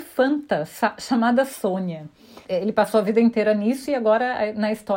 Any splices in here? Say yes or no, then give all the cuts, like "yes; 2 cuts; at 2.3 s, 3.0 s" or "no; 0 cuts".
yes; 1 cut; at 2.4 s